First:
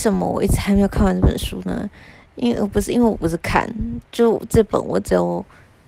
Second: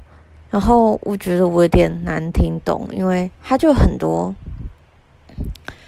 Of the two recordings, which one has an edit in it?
second; 1 cut; at 3.3 s

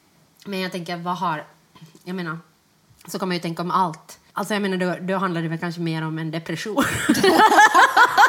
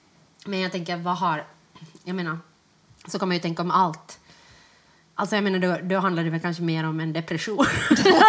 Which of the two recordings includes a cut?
first; 1 cut; at 4.3 s

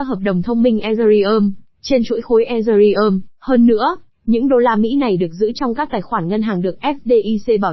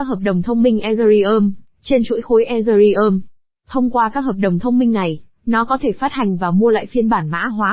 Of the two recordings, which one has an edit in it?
first; 1 cut; at 3.3 s

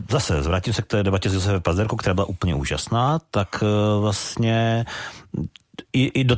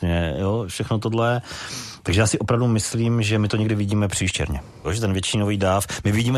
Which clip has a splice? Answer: second; 1 cut; at 4.8 s

